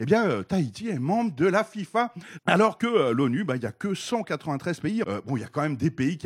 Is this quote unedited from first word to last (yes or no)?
no